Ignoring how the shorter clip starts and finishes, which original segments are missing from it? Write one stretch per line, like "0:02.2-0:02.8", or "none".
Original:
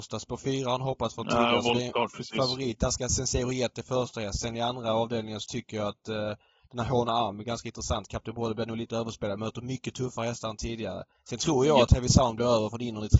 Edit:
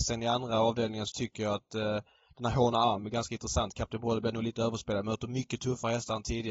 none